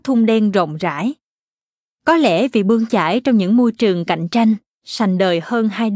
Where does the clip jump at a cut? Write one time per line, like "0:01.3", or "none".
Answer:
0:04.8

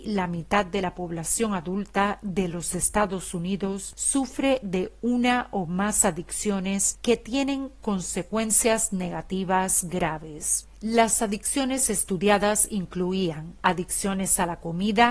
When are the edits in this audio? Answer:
none

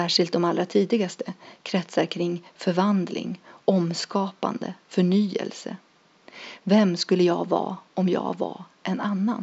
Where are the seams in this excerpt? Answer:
0:06.6

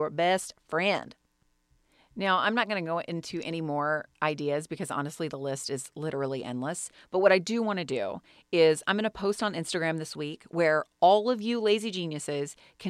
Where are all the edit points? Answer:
none

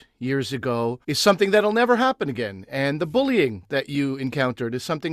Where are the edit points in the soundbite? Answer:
0:01.0

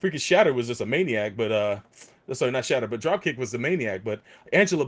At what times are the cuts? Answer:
none

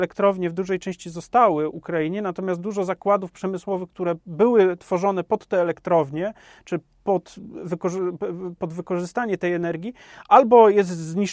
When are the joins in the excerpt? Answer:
none

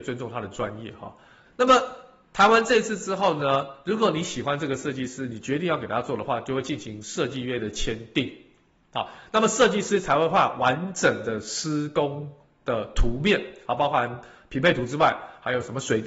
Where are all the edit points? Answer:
0:01.5

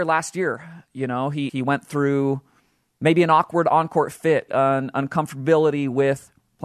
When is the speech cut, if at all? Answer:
0:01.5
0:04.5

